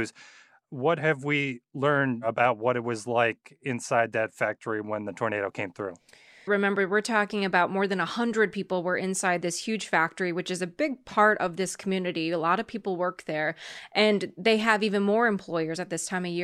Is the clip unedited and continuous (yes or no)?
no